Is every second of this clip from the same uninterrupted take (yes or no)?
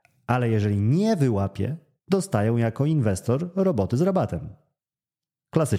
yes